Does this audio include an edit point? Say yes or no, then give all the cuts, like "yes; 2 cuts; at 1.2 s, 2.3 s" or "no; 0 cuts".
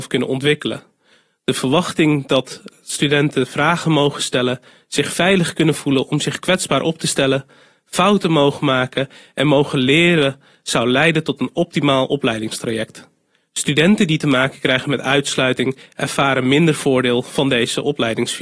no; 0 cuts